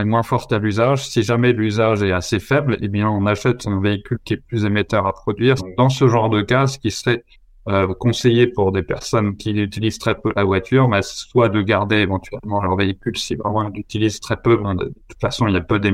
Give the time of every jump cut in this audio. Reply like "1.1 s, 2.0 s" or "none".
5.6 s